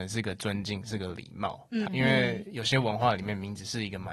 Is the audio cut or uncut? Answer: cut